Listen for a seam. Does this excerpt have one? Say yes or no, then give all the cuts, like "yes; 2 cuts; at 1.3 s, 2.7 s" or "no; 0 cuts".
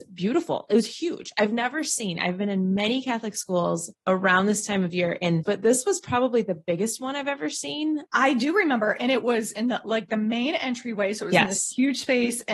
yes; 2 cuts; at 5.4 s, 8.1 s